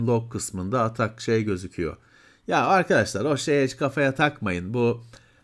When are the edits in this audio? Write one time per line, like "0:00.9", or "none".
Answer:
none